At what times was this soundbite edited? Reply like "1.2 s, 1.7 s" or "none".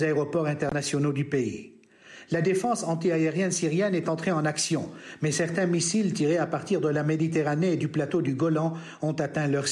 none